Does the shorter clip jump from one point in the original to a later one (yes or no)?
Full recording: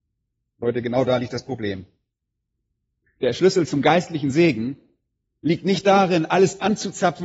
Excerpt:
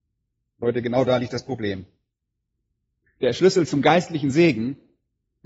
no